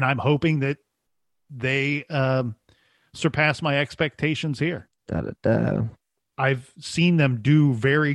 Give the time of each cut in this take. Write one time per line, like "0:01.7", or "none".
0:04.8
0:06.3